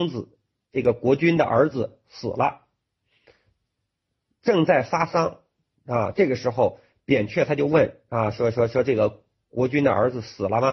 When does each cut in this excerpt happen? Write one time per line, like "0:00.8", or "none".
none